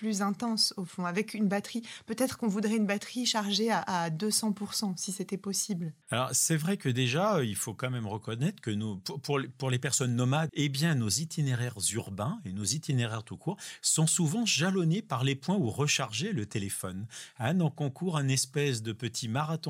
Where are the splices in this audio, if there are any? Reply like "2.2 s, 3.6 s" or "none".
6.0 s, 10.5 s